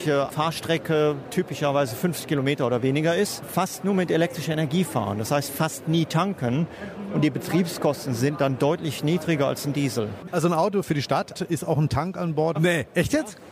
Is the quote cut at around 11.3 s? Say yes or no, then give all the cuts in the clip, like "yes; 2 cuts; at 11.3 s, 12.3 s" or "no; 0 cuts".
yes; 2 cuts; at 11.3 s, 12.5 s